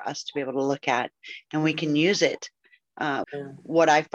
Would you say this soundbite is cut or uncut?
cut